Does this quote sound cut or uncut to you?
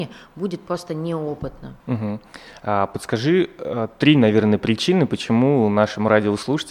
cut